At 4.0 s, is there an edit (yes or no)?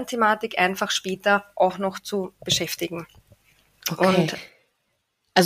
no